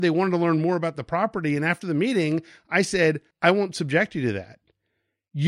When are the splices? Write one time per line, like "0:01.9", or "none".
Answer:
0:03.3